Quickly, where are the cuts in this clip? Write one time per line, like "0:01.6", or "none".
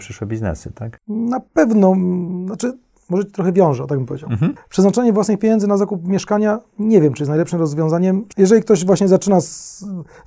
0:04.6